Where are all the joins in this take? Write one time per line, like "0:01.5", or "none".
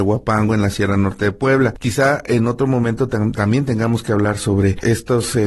none